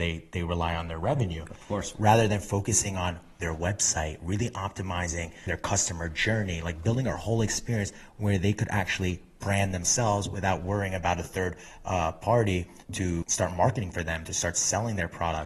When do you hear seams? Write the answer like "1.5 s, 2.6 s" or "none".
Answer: none